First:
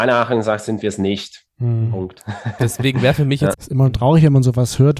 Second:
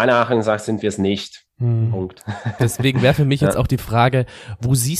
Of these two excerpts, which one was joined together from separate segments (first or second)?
first